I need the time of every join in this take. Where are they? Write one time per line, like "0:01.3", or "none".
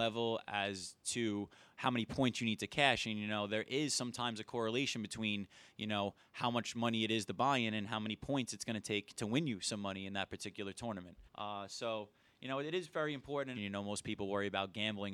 0:11.3
0:13.5